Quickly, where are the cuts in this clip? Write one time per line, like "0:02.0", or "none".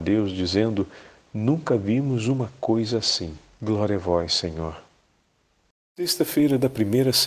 0:03.5